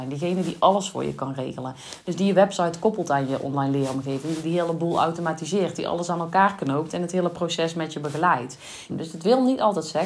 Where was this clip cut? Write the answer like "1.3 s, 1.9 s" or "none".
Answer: 8.9 s